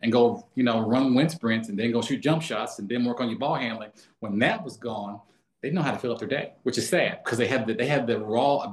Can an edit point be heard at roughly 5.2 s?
no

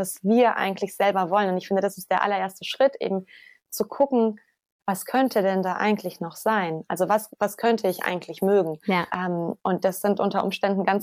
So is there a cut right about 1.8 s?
no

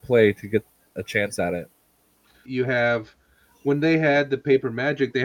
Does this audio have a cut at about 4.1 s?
no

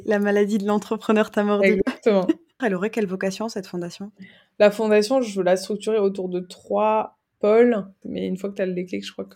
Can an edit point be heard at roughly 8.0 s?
yes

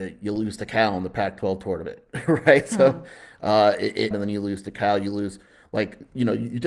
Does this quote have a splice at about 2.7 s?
no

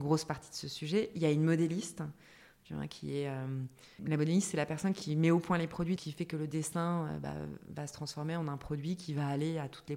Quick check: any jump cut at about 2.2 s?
no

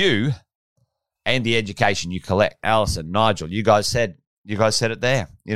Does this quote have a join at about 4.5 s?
no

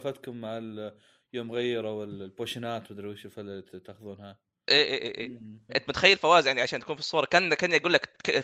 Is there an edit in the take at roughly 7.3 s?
no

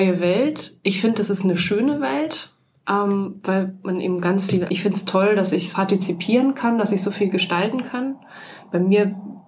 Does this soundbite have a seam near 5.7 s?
yes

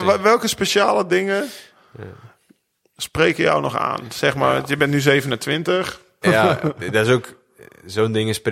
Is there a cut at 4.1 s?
no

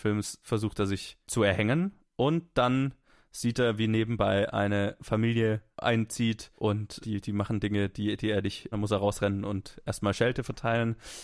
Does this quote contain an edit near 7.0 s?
yes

